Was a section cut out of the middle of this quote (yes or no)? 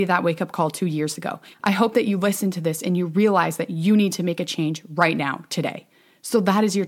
yes